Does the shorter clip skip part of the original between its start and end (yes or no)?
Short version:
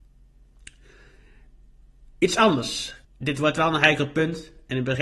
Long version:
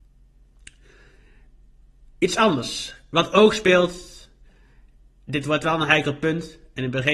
yes